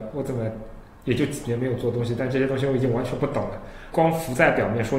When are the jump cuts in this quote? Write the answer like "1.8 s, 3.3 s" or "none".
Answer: 3.9 s